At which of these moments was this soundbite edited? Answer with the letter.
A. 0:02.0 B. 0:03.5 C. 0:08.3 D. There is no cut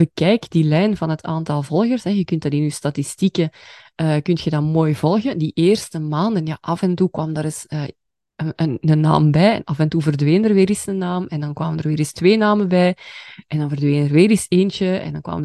D